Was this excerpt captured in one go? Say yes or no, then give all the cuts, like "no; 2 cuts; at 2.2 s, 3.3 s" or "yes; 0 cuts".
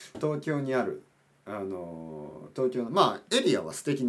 yes; 0 cuts